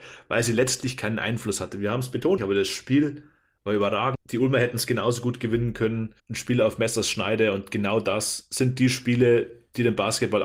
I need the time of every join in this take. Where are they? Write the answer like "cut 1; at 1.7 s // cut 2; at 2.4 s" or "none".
cut 1; at 2.4 s // cut 2; at 4.1 s // cut 3; at 6.2 s